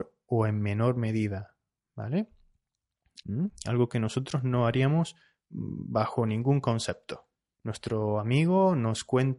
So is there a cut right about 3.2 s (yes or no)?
yes